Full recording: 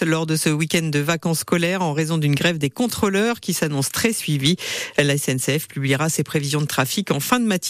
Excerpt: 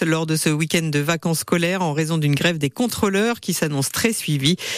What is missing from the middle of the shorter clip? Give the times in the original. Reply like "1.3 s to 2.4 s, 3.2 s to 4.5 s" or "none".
none

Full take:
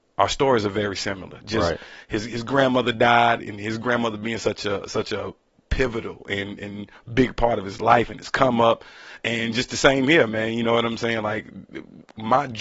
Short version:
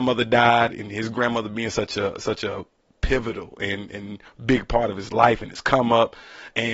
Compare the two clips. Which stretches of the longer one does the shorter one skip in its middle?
none

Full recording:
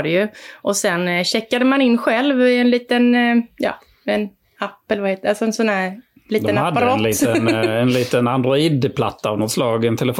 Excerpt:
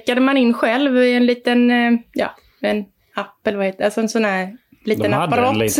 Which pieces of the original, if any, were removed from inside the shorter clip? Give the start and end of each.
none

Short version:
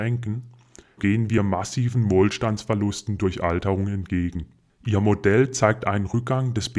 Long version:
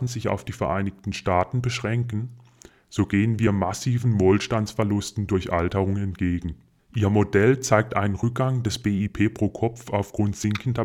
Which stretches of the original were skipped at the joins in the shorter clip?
2.8 s to 3.1 s

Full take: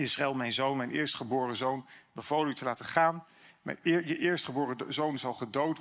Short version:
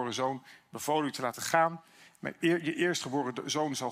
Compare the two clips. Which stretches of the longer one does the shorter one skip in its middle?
none

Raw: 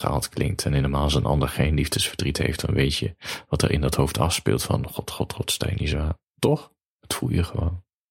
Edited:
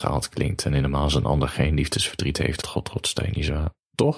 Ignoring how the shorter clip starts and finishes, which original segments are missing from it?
2.6 s to 5.1 s

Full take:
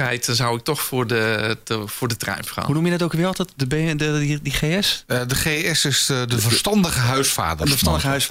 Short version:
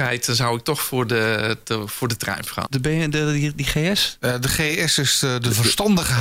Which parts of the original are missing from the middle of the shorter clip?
2.7 s to 3.5 s

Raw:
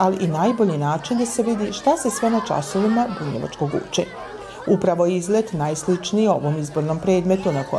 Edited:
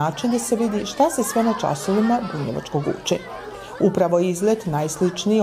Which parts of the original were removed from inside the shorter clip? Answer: none

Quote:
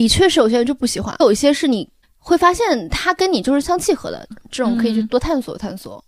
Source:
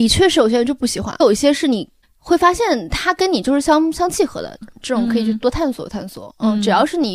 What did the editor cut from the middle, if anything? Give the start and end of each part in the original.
3.6 s to 3.9 s

